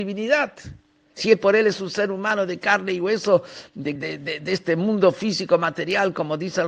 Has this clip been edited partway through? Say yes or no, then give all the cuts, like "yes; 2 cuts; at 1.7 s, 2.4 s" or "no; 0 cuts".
yes; 1 cut; at 4.0 s